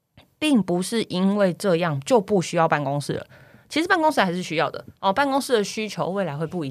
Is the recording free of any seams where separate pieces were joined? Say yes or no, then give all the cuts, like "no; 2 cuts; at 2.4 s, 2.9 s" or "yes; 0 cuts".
yes; 0 cuts